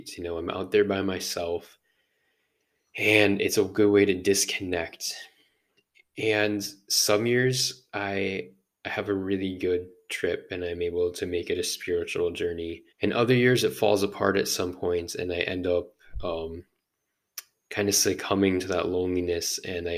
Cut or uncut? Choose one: cut